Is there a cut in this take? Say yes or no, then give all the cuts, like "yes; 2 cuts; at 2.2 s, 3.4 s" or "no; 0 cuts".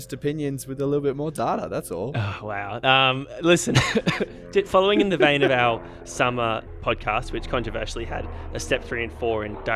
no; 0 cuts